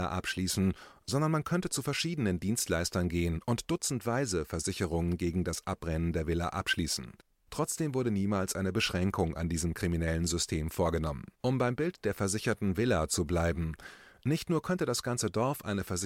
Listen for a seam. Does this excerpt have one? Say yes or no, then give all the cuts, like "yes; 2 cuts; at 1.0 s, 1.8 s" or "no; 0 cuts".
yes; 2 cuts; at 7.3 s, 11.3 s